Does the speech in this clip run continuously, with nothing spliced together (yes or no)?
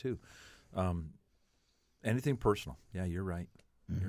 yes